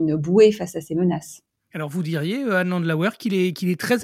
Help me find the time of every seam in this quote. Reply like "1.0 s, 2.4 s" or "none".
none